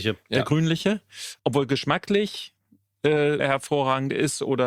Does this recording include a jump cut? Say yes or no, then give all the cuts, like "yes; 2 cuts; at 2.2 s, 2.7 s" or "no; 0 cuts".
yes; 2 cuts; at 1.4 s, 3.4 s